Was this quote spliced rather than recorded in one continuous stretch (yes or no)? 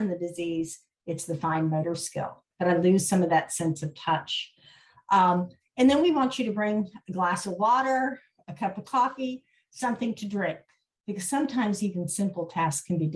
yes